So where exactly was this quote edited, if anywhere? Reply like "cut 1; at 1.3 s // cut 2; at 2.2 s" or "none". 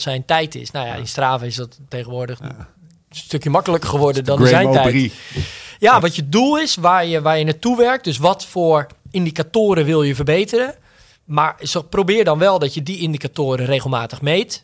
cut 1; at 6.0 s